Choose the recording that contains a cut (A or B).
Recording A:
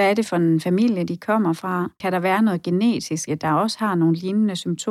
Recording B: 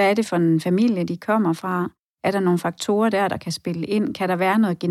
A